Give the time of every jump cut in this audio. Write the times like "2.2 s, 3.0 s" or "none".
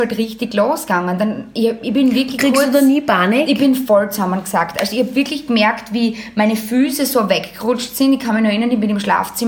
none